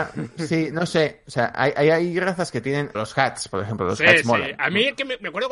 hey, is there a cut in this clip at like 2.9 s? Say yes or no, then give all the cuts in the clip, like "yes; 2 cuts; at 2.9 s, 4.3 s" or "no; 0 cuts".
yes; 1 cut; at 2.9 s